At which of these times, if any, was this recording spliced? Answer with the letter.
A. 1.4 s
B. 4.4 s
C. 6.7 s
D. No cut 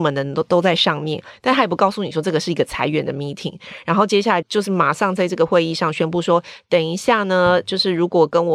B